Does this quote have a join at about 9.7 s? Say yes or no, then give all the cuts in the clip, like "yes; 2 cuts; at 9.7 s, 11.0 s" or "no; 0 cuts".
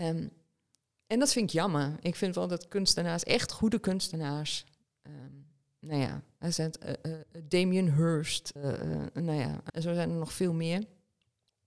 yes; 2 cuts; at 8.6 s, 9.7 s